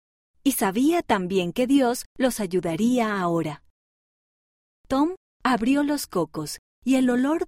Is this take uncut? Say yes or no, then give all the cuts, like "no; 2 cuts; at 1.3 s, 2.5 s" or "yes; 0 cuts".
yes; 0 cuts